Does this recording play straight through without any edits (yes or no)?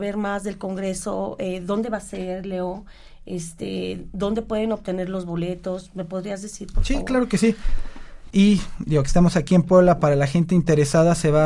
no